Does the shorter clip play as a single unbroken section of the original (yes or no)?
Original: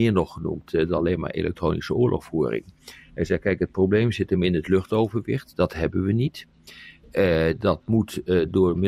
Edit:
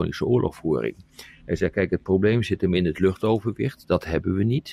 yes